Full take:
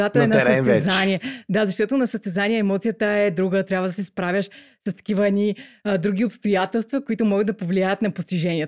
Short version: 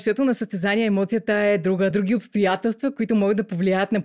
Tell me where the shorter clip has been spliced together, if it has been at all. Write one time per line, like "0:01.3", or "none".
0:01.9